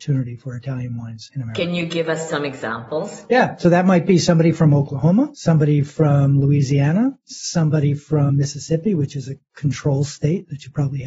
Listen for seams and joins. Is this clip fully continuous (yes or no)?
yes